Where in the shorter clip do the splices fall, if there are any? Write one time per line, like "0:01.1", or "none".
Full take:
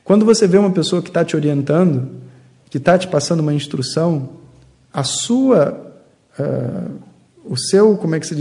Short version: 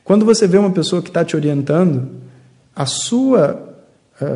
0:02.6